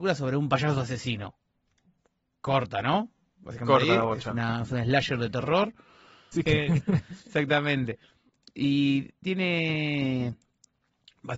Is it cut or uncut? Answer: cut